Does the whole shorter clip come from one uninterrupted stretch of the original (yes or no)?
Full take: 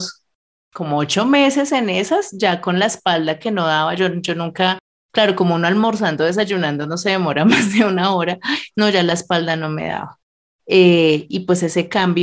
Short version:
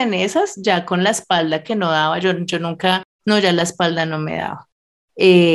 no